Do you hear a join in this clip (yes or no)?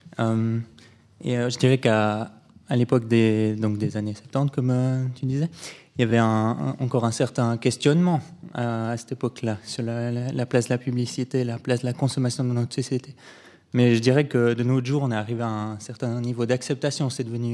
no